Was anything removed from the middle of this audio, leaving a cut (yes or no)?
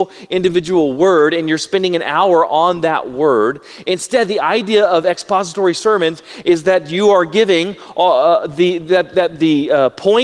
no